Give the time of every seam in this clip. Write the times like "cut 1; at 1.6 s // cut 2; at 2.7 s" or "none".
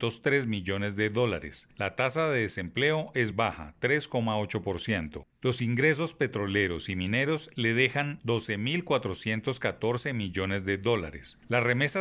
cut 1; at 3.3 s